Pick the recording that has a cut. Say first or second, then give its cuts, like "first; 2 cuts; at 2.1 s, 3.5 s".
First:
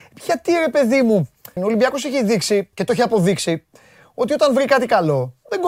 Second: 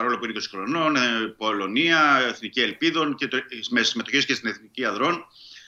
first; 2 cuts; at 1.6 s, 2.7 s